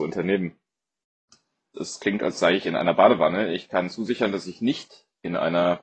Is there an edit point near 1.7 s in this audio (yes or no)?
yes